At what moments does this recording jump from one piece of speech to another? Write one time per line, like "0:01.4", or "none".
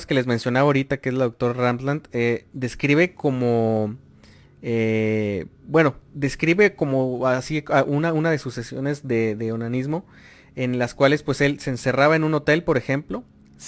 0:05.6